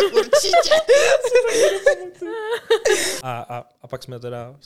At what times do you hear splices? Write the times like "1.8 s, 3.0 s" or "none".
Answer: 3.2 s